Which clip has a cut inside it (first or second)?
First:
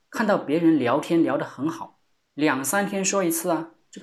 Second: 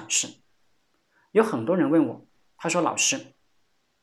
first